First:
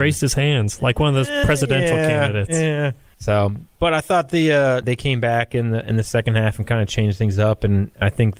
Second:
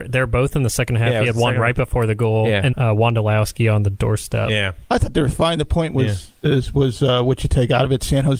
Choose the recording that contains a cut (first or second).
second